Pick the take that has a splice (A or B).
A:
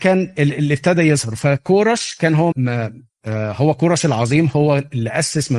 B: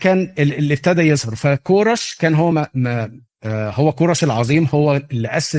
A